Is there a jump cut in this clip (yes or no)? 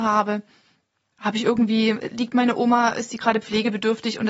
yes